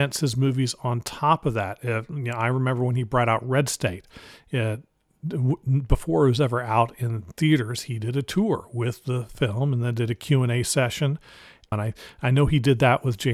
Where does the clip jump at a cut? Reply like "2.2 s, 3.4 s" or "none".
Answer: 11.7 s